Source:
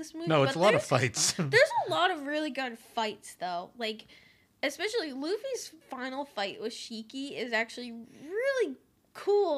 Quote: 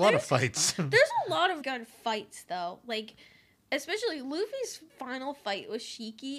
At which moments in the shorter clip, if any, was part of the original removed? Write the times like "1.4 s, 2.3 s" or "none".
1.6 s